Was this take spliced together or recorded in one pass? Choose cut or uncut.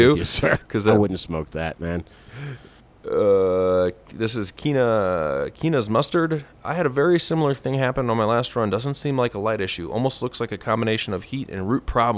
uncut